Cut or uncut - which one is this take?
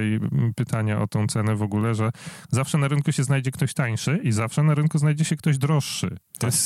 uncut